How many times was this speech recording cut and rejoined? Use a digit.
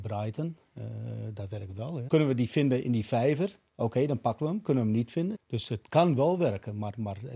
3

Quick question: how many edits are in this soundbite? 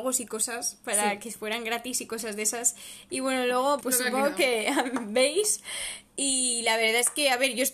1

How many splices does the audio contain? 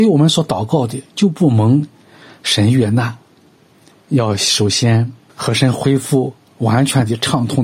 2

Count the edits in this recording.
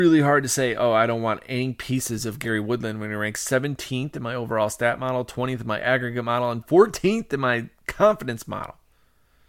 0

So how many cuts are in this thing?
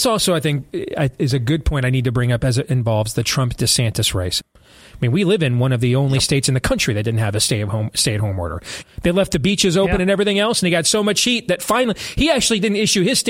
2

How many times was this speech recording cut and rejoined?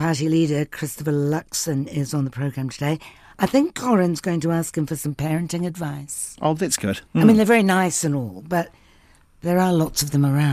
1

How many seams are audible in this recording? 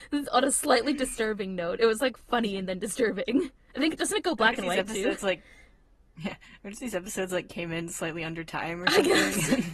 0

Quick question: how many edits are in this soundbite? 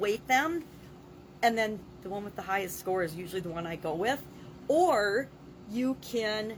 0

